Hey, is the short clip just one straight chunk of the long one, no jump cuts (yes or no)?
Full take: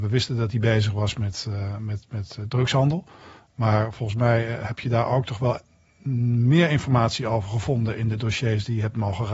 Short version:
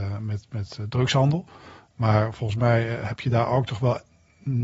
yes